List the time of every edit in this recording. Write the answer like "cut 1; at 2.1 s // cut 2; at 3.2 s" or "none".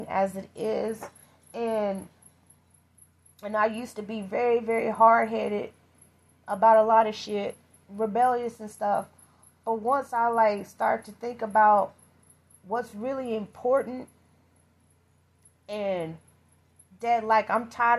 none